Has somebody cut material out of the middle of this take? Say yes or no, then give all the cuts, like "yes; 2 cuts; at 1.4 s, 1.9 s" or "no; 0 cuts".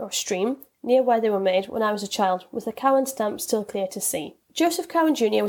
yes; 1 cut; at 4.4 s